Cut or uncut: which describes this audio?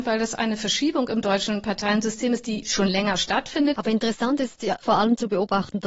cut